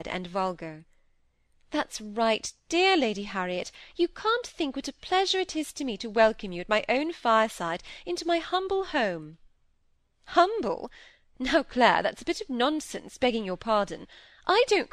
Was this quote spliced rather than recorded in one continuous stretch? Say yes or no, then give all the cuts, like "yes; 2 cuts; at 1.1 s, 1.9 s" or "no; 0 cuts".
no; 0 cuts